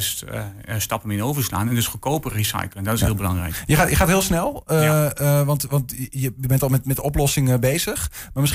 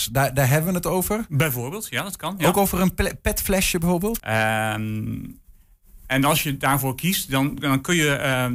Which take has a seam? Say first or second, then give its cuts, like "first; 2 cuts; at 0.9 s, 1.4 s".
second; 2 cuts; at 4.2 s, 7.6 s